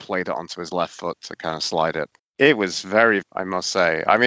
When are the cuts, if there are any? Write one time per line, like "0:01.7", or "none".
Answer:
0:02.2
0:03.2